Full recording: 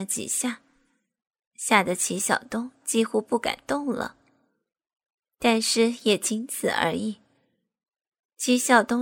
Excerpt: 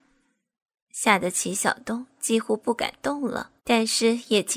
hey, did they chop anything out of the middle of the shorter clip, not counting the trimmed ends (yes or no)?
yes